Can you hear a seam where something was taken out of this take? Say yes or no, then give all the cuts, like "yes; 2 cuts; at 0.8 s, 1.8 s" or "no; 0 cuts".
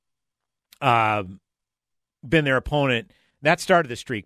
yes; 1 cut; at 3.3 s